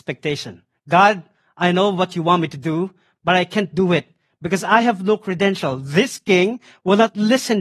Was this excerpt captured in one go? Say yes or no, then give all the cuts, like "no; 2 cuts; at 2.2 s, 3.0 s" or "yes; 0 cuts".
yes; 0 cuts